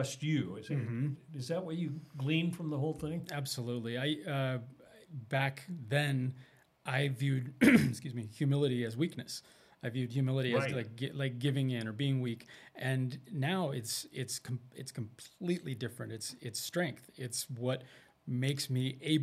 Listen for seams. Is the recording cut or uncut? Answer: uncut